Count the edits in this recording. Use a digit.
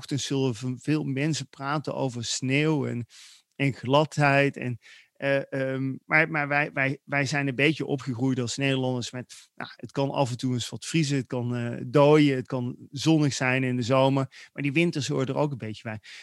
0